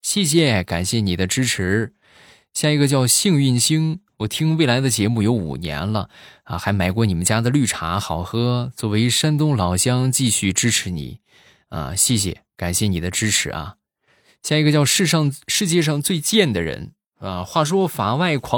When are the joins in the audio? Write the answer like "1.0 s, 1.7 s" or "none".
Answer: none